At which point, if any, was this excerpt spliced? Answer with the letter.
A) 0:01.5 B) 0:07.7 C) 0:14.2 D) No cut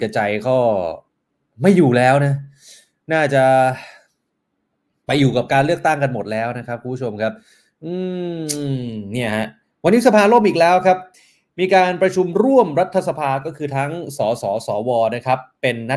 D